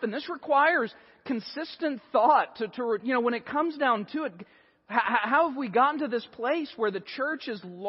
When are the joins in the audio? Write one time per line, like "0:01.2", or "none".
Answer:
0:03.0